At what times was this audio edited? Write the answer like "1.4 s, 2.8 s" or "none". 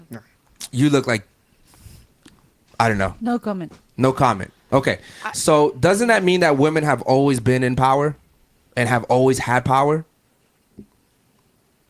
none